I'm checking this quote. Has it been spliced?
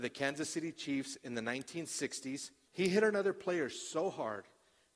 yes; 1 cut; at 2.7 s

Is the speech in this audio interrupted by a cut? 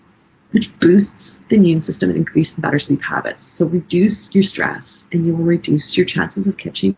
no; 0 cuts

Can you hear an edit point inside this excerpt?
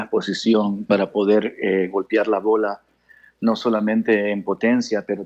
no; 0 cuts

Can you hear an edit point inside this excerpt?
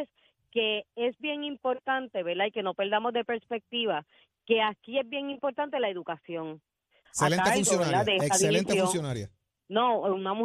yes; 1 cut; at 7.0 s

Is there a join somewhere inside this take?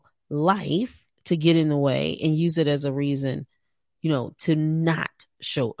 no; 0 cuts

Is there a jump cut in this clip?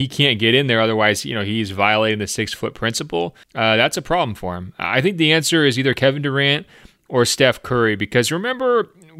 yes; 1 cut; at 3.4 s

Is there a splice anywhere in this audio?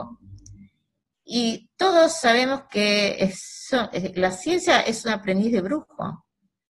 no; 0 cuts

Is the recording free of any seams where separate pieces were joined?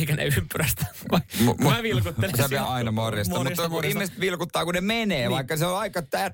no; 1 cut; at 2.6 s

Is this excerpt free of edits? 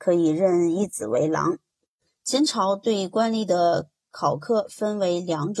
no; 1 cut; at 2.1 s

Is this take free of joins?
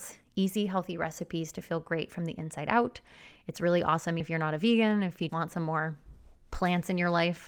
no; 2 cuts; at 4.2 s, 5.3 s

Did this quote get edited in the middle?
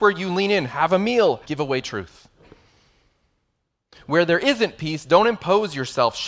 yes; 1 cut; at 1.4 s

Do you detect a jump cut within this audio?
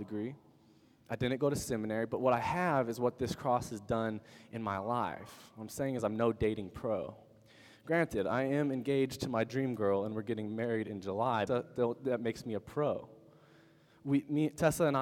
yes; 1 cut; at 11.5 s

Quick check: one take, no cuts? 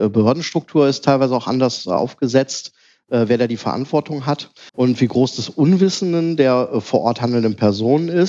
no; 1 cut; at 4.7 s

